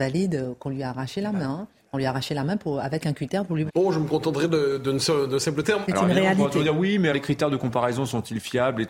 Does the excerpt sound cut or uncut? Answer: cut